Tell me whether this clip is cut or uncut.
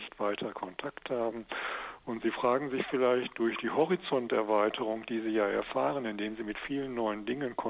uncut